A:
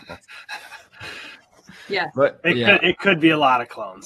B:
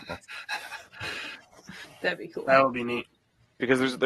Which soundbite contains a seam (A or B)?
B